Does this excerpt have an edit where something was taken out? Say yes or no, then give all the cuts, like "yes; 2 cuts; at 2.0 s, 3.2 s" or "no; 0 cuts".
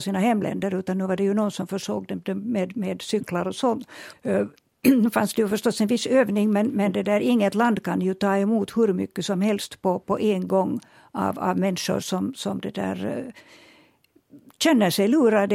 yes; 1 cut; at 4.1 s